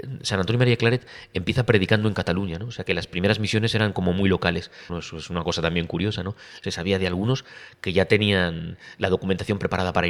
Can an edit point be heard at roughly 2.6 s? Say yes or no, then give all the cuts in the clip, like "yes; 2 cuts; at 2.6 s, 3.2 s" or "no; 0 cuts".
no; 2 cuts; at 4.9 s, 6.6 s